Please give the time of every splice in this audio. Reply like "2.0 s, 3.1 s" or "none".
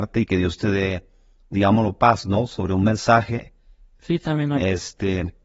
4.0 s